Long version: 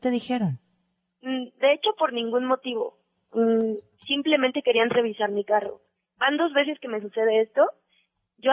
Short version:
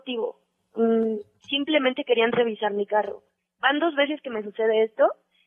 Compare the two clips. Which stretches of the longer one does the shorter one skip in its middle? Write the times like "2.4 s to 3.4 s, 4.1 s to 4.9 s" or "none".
none